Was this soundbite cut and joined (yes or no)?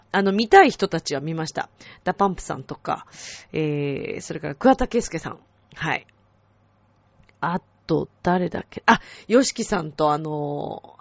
no